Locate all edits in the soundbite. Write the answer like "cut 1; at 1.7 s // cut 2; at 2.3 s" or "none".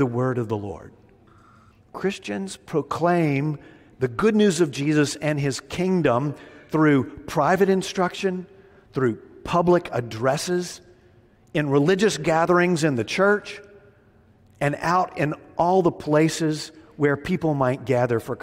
cut 1; at 1.7 s

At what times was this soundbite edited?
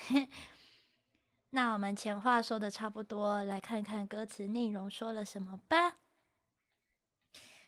none

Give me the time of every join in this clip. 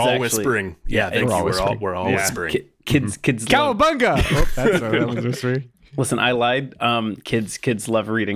none

